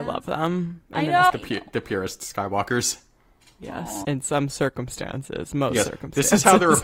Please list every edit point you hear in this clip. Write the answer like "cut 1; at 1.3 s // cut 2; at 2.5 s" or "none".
cut 1; at 1.3 s // cut 2; at 4.0 s